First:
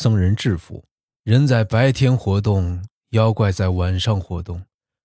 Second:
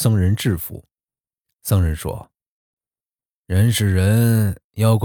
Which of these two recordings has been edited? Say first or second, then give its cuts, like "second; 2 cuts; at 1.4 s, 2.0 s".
first; 1 cut; at 1.2 s